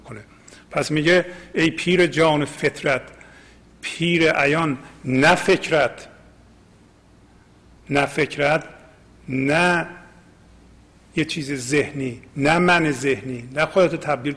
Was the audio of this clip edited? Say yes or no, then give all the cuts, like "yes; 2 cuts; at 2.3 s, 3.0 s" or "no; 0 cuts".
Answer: no; 0 cuts